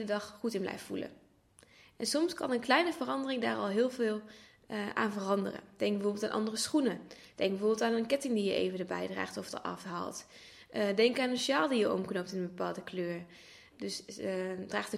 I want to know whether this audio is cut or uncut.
cut